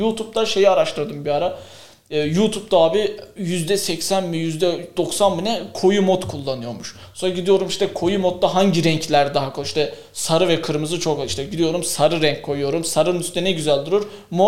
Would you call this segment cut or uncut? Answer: uncut